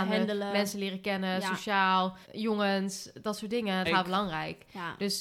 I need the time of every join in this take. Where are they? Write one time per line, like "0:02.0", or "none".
0:02.2
0:03.8